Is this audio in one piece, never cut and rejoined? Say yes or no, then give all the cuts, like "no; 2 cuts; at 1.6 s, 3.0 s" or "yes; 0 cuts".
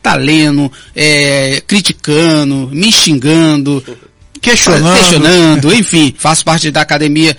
no; 1 cut; at 6.1 s